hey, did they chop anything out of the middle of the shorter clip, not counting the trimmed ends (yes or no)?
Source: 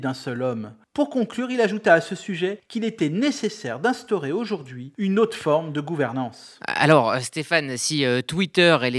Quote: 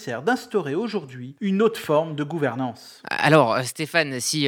no